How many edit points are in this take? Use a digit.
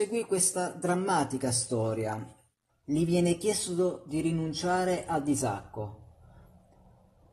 1